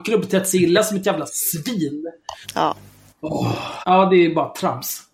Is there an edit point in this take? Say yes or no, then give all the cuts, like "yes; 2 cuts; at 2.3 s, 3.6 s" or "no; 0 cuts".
yes; 2 cuts; at 2.4 s, 3.8 s